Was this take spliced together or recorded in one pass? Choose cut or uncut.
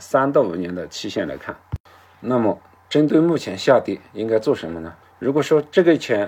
cut